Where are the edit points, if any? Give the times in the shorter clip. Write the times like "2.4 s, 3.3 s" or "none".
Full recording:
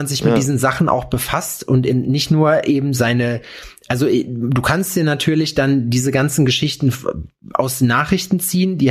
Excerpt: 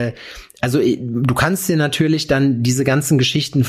none